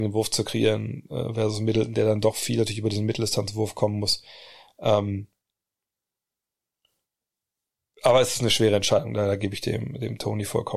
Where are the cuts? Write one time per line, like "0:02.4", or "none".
none